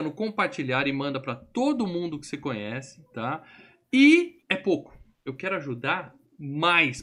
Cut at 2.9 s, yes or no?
no